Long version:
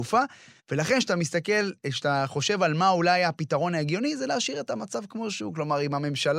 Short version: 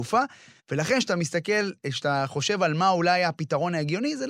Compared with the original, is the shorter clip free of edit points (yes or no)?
yes